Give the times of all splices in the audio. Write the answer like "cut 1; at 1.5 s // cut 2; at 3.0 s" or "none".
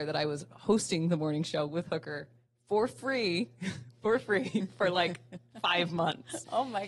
none